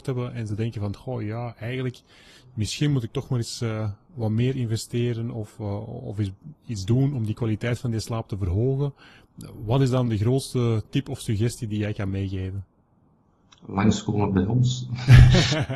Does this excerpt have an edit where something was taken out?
no; 0 cuts

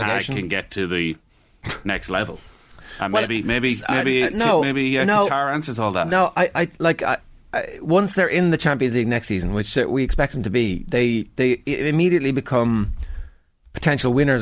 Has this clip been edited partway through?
no; 0 cuts

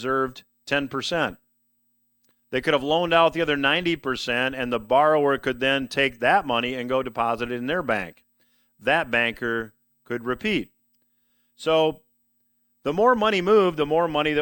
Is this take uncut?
yes; 0 cuts

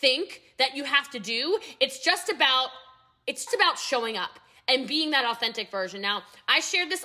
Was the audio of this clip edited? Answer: yes; 1 cut; at 3.5 s

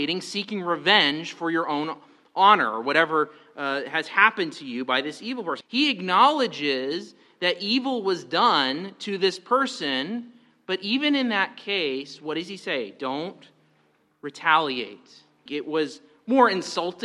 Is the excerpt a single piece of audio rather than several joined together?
no; 2 cuts; at 5.6 s, 15.5 s

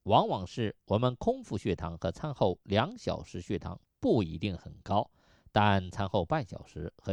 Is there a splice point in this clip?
no; 0 cuts

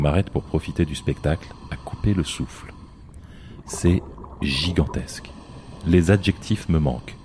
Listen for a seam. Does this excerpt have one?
no; 0 cuts

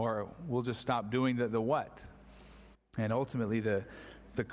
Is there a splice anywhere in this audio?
yes; 1 cut; at 2.7 s

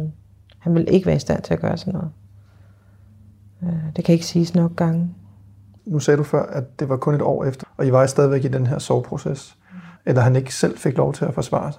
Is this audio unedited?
no; 3 cuts; at 5.8 s, 7.6 s, 10.0 s

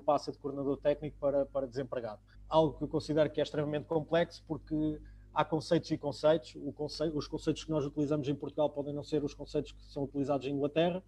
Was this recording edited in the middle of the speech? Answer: yes; 1 cut; at 2.3 s

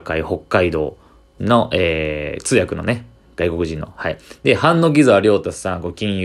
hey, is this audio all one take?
yes; 0 cuts

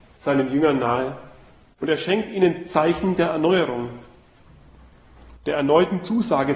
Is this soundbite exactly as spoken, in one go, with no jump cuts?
yes; 0 cuts

